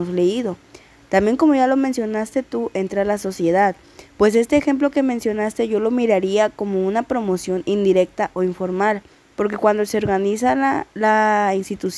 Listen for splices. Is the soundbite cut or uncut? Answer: uncut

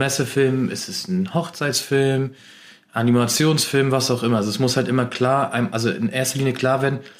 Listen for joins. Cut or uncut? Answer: uncut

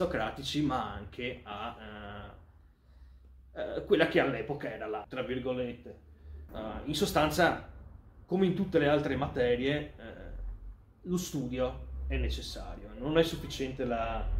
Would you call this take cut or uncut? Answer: cut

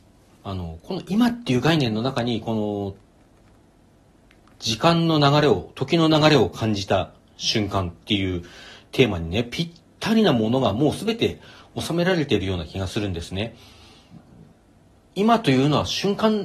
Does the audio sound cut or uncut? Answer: uncut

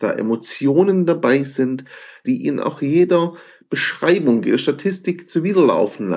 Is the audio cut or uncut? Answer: cut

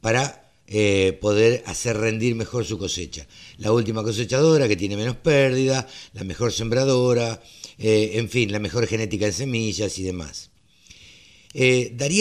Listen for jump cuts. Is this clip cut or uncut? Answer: uncut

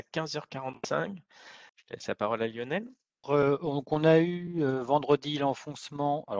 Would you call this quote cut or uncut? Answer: cut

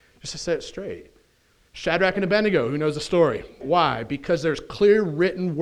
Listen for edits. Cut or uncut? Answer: cut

